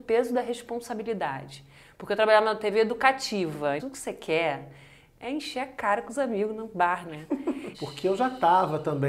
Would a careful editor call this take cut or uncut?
cut